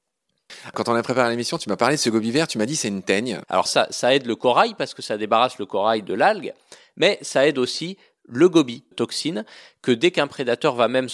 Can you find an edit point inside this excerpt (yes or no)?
yes